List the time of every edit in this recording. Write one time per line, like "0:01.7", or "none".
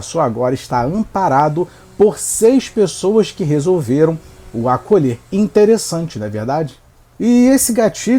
none